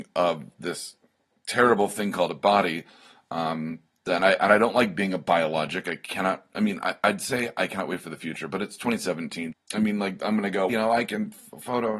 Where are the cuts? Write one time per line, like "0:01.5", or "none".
0:09.5
0:10.7